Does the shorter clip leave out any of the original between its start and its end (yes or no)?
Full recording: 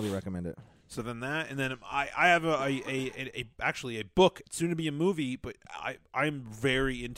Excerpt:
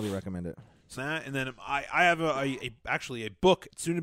yes